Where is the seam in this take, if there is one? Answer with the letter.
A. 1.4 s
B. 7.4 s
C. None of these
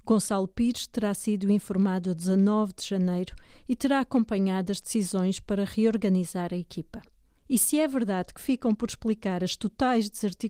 B